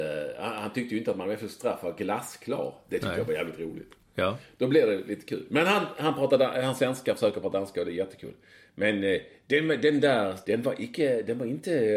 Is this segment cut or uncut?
cut